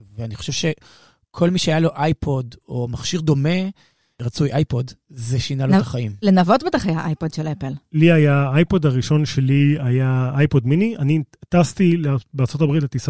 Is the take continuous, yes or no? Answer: yes